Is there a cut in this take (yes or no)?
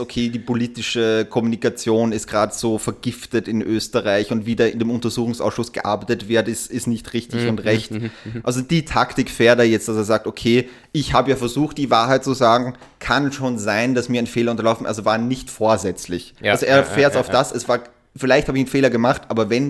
no